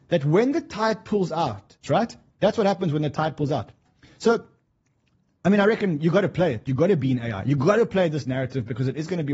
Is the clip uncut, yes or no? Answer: no